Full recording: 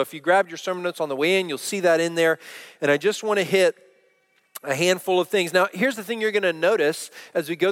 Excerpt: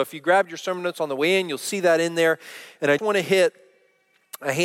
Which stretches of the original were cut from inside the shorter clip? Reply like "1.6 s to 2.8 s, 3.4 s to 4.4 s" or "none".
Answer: 3.0 s to 3.2 s